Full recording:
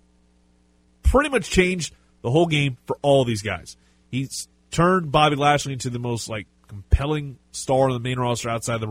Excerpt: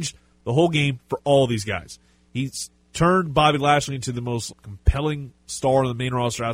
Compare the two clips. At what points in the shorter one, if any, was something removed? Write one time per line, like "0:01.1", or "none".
0:04.5